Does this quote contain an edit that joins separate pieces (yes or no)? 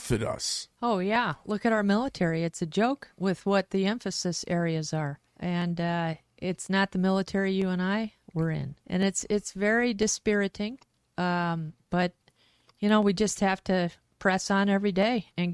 yes